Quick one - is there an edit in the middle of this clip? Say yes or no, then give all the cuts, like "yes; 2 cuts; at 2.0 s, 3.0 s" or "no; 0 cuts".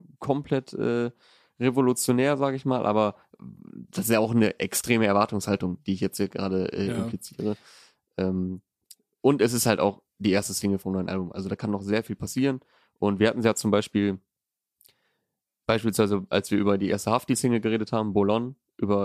no; 0 cuts